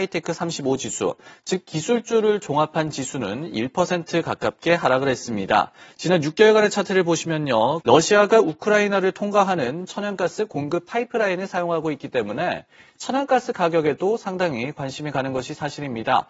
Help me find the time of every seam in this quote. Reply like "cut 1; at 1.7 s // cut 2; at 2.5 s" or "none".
cut 1; at 5.9 s // cut 2; at 7.8 s